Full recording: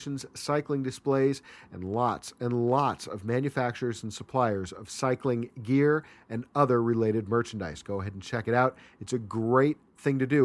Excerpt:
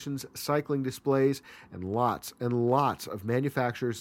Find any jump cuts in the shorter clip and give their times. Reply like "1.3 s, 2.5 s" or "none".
none